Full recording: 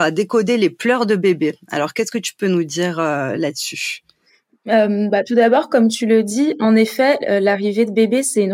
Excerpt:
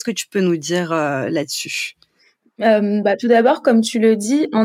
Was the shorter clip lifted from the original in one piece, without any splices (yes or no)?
yes